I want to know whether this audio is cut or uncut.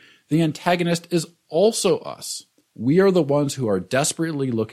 cut